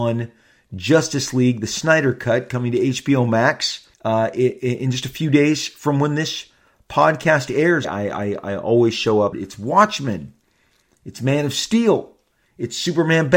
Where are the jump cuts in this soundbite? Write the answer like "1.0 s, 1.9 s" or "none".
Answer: 3.9 s, 7.8 s, 9.3 s